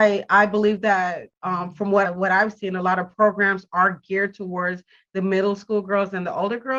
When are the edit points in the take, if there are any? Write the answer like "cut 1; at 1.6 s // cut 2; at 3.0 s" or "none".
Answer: cut 1; at 2.0 s